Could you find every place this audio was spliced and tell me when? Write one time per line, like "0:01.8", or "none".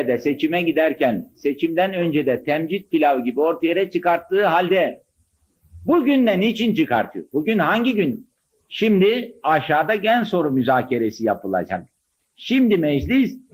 none